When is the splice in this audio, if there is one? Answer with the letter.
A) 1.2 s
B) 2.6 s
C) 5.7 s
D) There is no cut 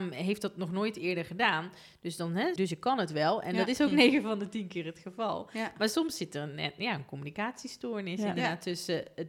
B